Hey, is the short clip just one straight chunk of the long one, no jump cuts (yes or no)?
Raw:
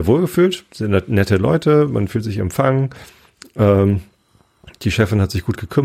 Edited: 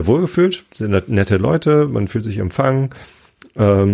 yes